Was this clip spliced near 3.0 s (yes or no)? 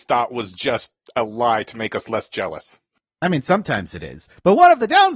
no